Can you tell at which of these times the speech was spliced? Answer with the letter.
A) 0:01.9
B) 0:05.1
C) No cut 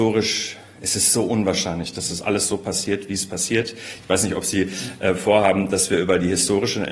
C